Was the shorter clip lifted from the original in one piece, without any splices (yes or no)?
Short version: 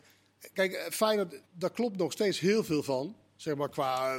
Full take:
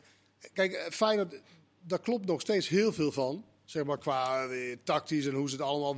no